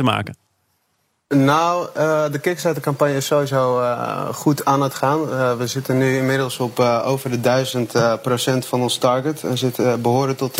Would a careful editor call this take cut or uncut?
uncut